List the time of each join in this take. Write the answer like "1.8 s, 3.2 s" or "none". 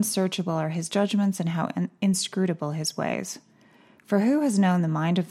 none